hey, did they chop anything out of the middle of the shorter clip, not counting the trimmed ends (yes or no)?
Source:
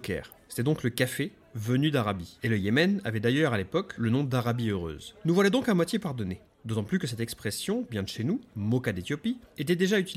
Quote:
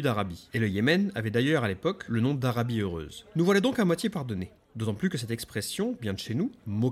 no